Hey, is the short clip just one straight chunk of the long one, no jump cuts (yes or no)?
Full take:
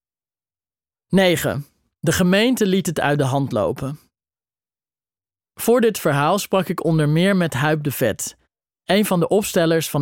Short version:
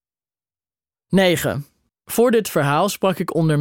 no